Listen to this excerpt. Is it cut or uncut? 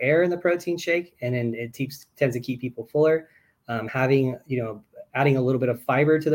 uncut